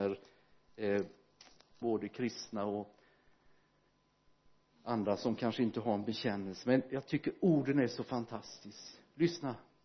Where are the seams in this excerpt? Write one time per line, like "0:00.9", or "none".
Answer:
0:01.8